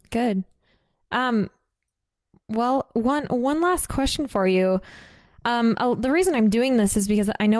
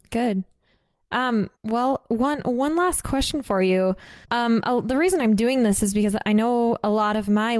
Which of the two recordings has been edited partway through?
second; 2 cuts; at 1.6 s, 4.2 s

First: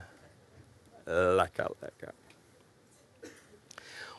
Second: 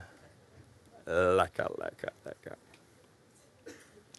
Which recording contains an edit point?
first; 1 cut; at 1.7 s

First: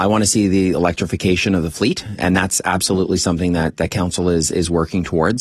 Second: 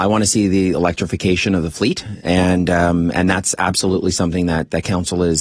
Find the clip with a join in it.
first; 1 cut; at 2.2 s

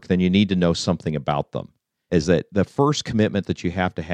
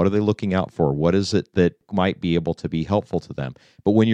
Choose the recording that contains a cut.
first; 1 cut; at 2.1 s

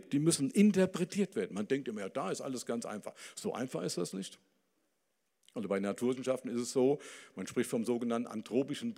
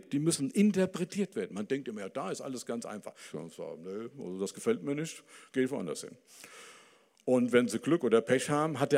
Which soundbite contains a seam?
second; 1 cut; at 3.3 s

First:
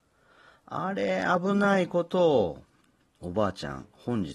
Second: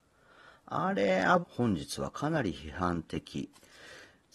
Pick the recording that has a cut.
second; 1 cut; at 1.4 s

